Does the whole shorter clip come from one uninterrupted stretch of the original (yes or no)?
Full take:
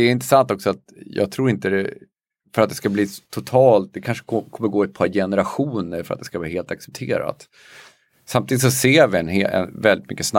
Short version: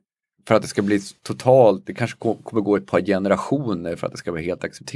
yes